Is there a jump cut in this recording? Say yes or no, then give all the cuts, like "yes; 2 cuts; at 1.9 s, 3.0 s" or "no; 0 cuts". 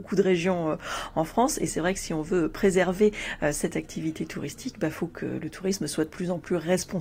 no; 0 cuts